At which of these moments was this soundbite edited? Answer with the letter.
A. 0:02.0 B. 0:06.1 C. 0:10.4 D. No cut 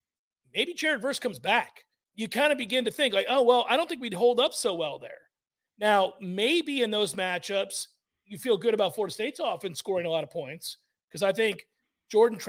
A